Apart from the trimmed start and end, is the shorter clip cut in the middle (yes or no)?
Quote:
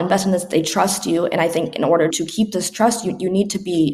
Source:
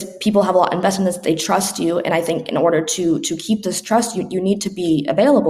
yes